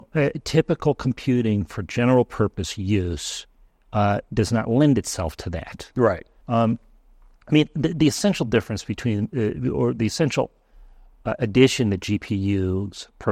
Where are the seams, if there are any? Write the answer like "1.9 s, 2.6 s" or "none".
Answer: 6.4 s

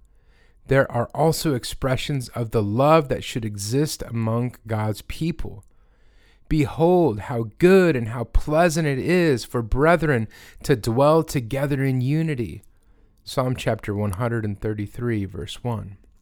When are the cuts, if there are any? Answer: none

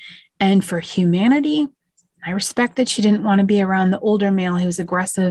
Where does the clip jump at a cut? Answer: none

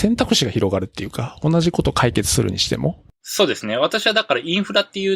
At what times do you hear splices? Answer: none

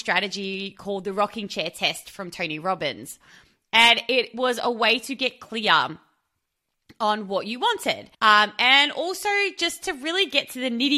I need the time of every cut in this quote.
8.1 s

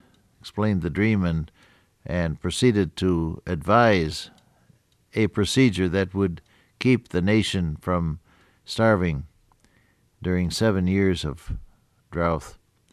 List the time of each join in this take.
none

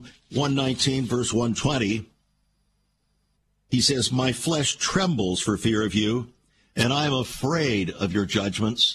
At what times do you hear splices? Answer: none

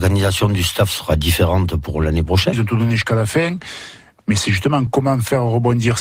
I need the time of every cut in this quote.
2.5 s, 4.9 s

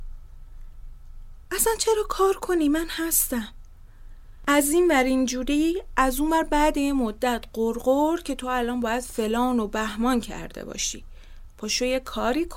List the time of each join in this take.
none

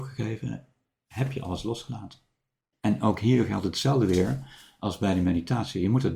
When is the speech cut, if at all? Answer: 2.7 s

